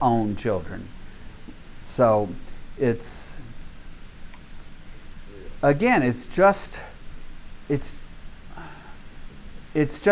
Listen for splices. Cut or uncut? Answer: uncut